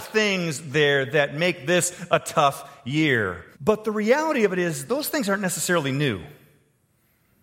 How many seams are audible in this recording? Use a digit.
1